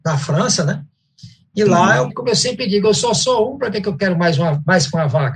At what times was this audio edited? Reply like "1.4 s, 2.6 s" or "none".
2.1 s